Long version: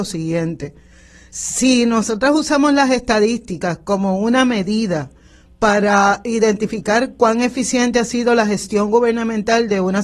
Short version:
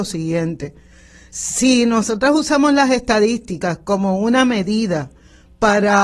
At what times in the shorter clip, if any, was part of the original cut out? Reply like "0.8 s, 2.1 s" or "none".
none